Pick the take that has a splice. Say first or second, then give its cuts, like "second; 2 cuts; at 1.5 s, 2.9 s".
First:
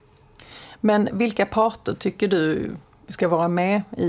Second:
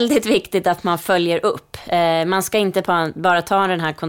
first; 1 cut; at 1.1 s